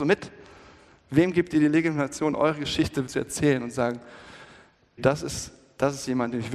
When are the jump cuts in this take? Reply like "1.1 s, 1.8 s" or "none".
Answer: 3.1 s, 5.0 s